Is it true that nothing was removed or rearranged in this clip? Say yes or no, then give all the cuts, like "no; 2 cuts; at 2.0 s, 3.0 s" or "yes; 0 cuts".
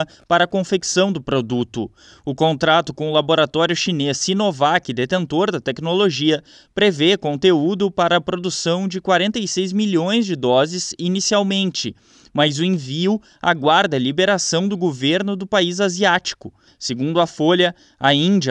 no; 1 cut; at 16.7 s